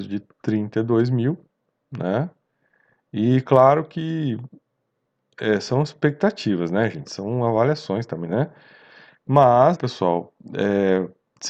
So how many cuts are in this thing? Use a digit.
2